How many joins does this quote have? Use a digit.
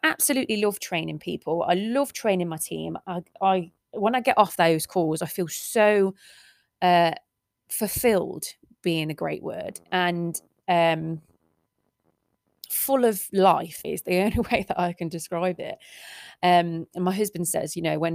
1